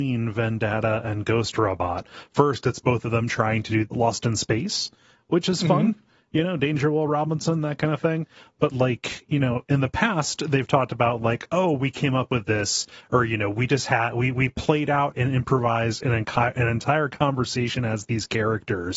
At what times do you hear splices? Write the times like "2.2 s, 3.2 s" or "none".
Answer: 3.9 s